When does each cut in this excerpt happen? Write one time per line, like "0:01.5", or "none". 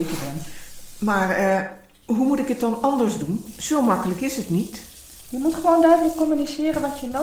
none